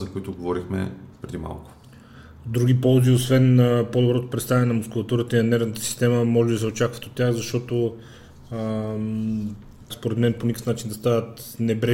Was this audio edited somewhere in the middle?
yes; 1 cut; at 9.9 s

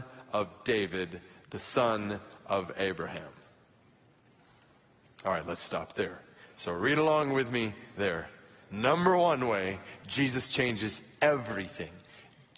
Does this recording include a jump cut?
yes; 2 cuts; at 6.5 s, 8.6 s

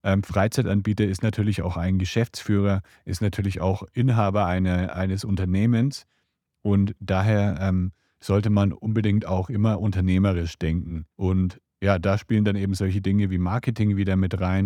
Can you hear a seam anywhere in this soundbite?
yes; 1 cut; at 11.1 s

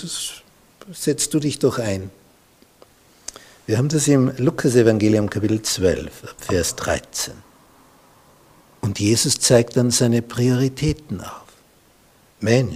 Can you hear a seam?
no; 0 cuts

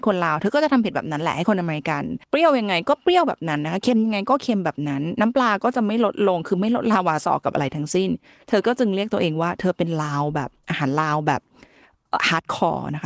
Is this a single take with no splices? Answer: no; 1 cut; at 2.2 s

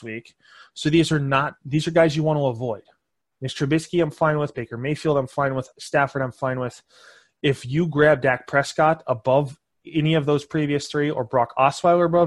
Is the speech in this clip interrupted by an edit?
no; 0 cuts

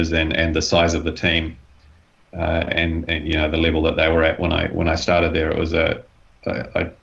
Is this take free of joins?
yes; 0 cuts

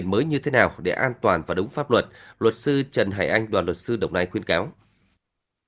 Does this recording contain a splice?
no; 0 cuts

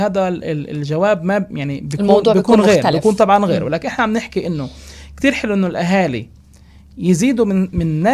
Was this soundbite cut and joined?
no; 0 cuts

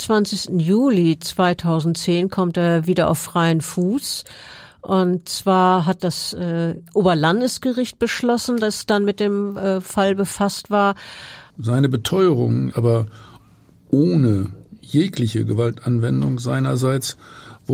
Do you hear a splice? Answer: yes; 3 cuts; at 6.0 s, 11.5 s, 12.7 s

